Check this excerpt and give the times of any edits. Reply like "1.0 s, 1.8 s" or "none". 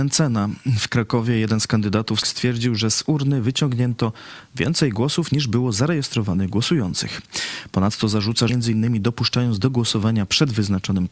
2.2 s, 8.5 s